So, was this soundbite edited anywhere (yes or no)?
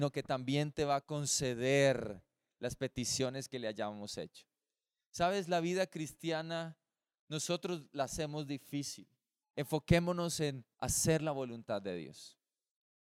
yes